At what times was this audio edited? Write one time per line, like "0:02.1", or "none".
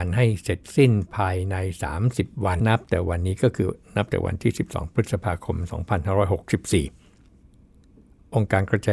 0:02.6